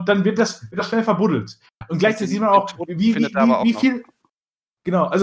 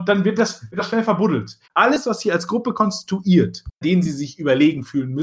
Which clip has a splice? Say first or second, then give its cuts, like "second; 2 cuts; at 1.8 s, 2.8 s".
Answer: second; 2 cuts; at 1.7 s, 3.8 s